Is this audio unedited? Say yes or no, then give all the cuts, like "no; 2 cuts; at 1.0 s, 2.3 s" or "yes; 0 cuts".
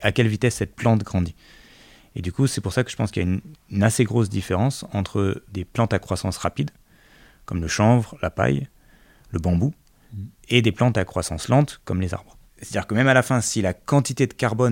no; 2 cuts; at 5.5 s, 12.5 s